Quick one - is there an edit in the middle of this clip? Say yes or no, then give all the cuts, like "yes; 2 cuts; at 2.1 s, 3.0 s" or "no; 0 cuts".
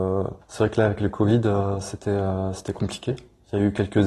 no; 0 cuts